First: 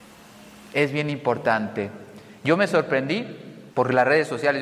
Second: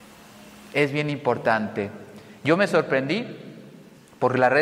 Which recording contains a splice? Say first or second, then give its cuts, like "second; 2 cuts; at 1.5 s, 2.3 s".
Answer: first; 1 cut; at 3.7 s